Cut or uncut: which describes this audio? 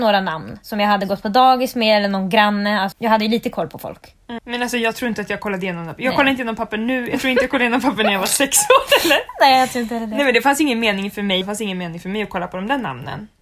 cut